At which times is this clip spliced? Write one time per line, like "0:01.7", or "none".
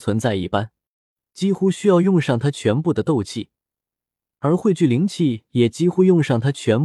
0:01.2